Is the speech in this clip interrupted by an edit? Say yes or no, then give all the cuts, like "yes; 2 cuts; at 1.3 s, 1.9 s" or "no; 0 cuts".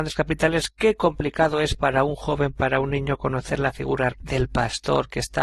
yes; 1 cut; at 4.1 s